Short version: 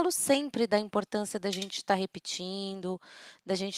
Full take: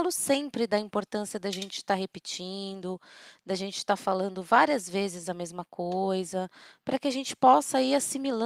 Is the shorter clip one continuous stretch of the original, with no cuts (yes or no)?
yes